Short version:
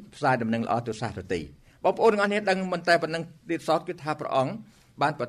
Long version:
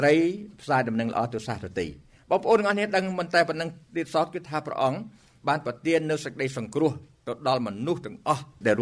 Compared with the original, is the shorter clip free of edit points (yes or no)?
yes